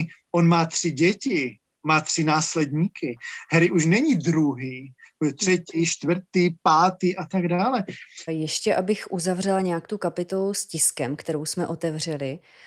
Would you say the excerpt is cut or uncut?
cut